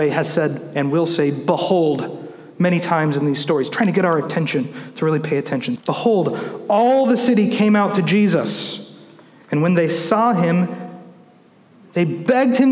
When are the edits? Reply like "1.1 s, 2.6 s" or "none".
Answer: 5.8 s